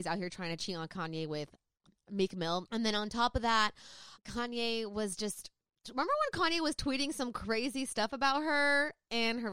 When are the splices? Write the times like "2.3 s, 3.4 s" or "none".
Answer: 2.7 s, 4.2 s